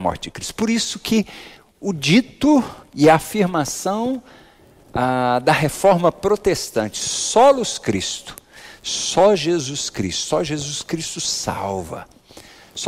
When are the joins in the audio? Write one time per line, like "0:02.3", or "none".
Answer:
none